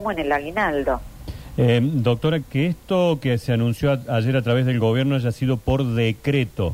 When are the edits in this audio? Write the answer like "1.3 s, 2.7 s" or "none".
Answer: 2.4 s